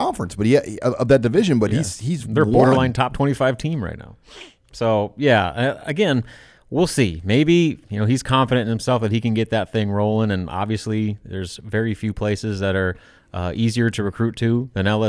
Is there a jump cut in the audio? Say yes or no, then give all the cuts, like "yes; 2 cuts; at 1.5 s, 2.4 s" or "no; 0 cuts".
no; 0 cuts